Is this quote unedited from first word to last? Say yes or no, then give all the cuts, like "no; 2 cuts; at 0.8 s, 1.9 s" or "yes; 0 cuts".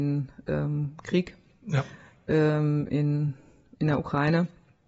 yes; 0 cuts